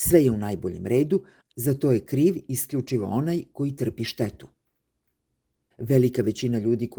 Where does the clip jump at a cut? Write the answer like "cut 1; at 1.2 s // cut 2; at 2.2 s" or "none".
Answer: cut 1; at 1.5 s // cut 2; at 5.7 s